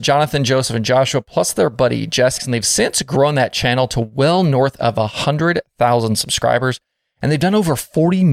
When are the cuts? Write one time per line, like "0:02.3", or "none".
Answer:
0:02.4